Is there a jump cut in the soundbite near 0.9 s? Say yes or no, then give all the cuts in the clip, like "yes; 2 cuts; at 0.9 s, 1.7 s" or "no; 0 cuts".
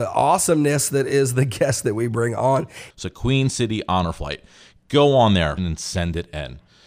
no; 2 cuts; at 2.9 s, 5.6 s